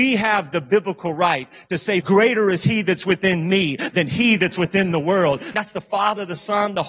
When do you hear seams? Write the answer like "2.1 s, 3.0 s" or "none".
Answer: 2.0 s, 5.5 s